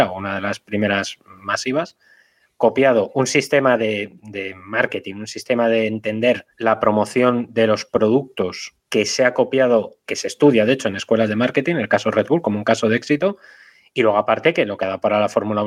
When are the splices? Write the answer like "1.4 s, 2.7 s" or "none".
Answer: 6.5 s, 8.8 s, 10.1 s